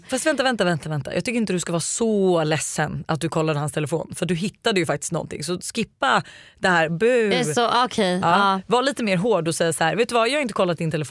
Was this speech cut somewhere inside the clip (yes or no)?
no